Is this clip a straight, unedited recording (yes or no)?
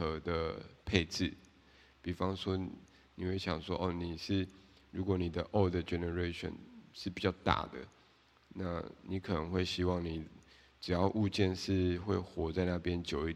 yes